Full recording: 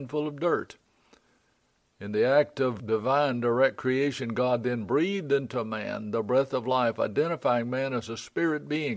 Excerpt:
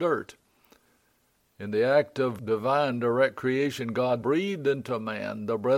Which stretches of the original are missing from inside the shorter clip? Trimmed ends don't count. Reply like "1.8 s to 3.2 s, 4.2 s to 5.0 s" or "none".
4.6 s to 4.9 s

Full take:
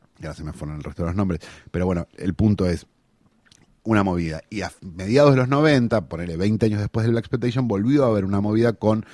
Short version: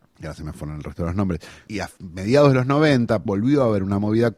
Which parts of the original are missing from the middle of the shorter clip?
1.7 s to 4.5 s, 6.1 s to 7.7 s

